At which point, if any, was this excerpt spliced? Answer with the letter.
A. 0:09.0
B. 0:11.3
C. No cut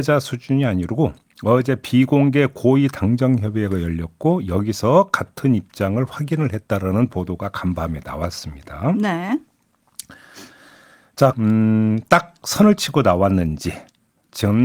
B